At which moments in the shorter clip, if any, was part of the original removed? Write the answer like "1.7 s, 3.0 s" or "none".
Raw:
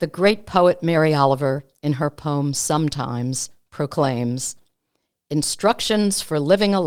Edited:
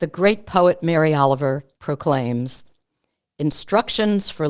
1.8 s